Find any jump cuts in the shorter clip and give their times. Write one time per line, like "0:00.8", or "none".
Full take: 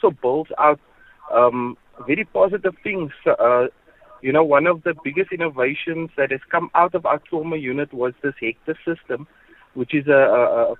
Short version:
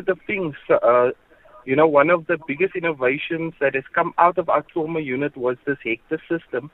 none

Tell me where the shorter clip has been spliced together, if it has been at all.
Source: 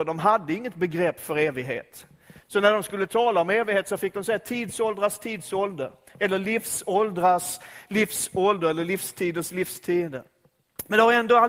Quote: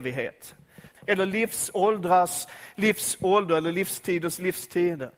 0:00.9

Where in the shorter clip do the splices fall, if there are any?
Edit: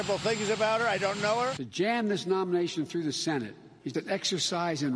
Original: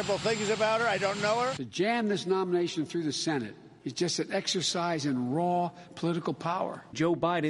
0:03.9

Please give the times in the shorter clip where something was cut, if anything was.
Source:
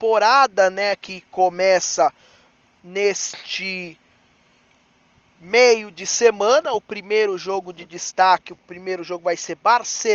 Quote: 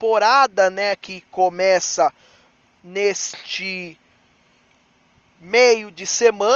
none

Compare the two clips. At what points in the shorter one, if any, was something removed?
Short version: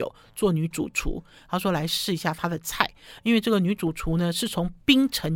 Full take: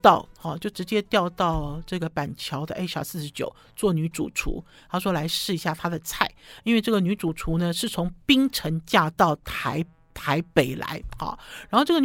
none

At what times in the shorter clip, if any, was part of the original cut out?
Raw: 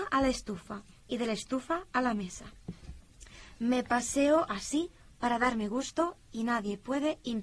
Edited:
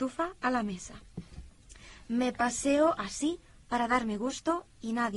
none

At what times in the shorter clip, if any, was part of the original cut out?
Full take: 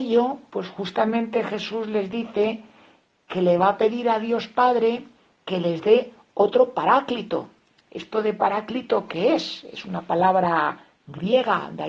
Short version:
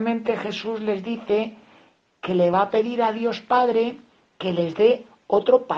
none

